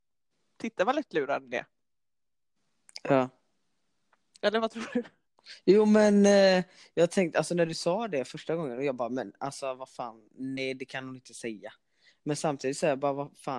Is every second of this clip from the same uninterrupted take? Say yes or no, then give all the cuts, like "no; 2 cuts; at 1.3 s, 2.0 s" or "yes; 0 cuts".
yes; 0 cuts